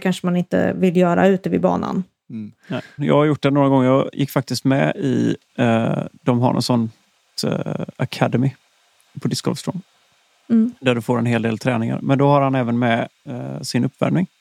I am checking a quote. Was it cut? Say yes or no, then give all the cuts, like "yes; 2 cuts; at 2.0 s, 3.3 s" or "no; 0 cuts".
yes; 1 cut; at 3.0 s